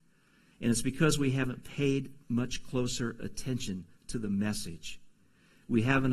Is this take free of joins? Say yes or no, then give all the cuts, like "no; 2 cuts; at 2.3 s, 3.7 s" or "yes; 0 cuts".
yes; 0 cuts